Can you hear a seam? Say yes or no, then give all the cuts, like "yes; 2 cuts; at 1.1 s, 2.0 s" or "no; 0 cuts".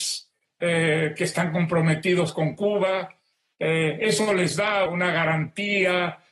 yes; 1 cut; at 4.9 s